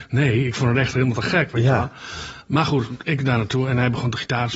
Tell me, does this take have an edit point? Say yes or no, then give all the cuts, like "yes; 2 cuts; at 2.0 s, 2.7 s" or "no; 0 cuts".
no; 0 cuts